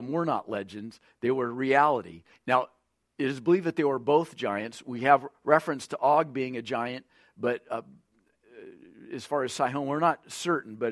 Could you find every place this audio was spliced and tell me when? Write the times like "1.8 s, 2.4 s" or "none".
2.3 s